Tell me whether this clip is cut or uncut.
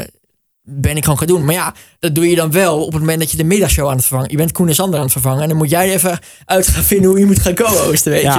uncut